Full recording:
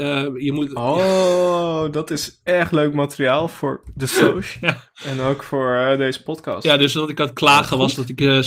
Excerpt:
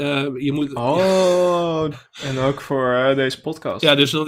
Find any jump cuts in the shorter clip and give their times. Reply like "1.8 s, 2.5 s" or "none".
1.9 s